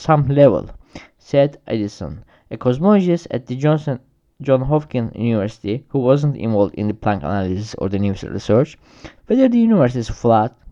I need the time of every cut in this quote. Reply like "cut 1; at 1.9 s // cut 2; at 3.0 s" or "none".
cut 1; at 9.2 s